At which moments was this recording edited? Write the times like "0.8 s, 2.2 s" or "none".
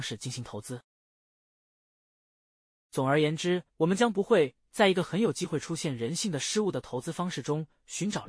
3.7 s